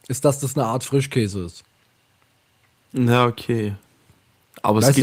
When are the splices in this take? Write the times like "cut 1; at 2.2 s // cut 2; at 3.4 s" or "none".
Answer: none

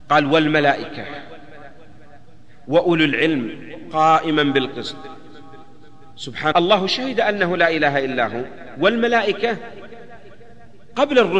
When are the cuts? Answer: cut 1; at 6.5 s

